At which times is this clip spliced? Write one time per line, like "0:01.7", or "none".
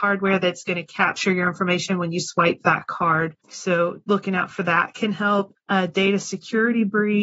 0:03.4
0:05.6